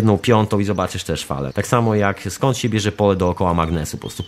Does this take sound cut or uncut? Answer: cut